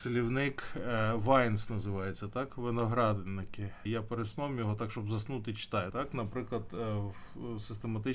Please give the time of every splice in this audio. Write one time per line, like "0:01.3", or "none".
0:03.9
0:05.9